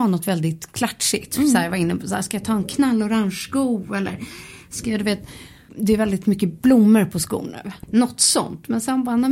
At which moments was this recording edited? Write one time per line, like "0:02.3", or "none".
0:05.7
0:07.8